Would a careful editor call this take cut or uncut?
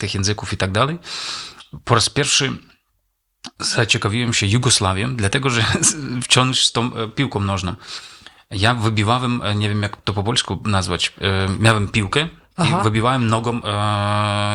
uncut